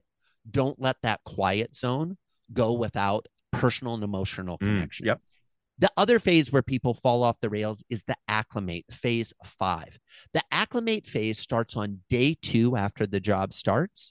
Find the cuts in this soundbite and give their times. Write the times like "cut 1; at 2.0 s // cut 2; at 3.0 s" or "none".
cut 1; at 8.8 s